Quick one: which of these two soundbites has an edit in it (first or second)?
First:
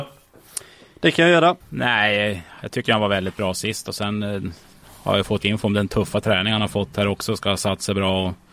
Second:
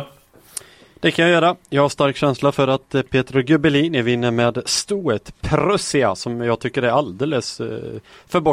first